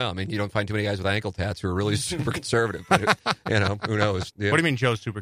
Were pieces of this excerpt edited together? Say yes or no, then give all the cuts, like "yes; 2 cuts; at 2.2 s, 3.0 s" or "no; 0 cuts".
yes; 1 cut; at 4.3 s